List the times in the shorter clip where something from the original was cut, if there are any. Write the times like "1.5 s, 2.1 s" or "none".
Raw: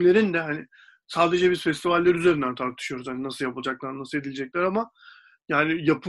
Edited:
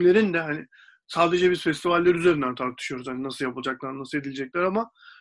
none